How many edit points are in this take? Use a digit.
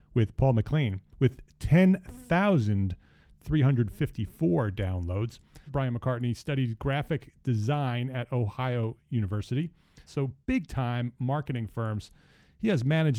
2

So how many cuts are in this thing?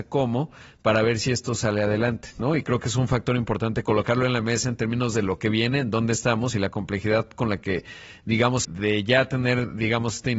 1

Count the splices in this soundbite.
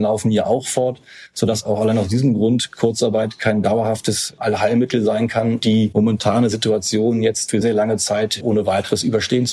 2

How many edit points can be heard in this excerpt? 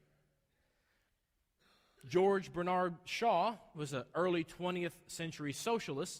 1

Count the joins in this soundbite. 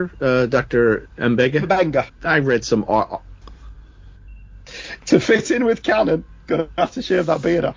2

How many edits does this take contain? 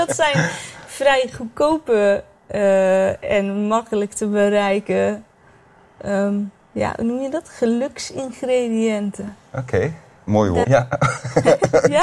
1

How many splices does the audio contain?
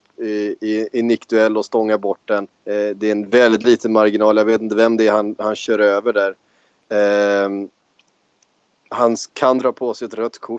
1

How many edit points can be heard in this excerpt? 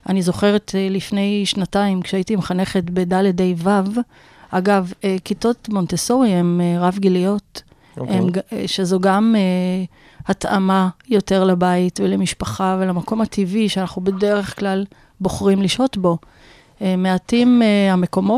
0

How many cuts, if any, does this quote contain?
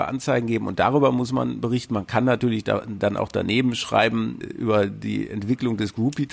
1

